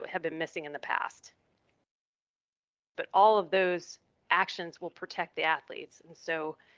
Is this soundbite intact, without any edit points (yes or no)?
no